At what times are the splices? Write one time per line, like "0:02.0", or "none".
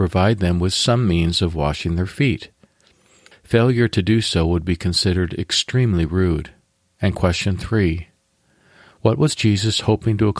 0:03.3
0:07.0